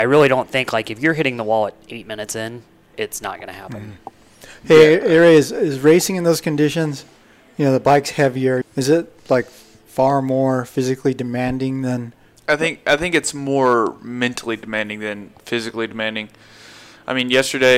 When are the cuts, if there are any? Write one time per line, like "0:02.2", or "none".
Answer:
0:08.6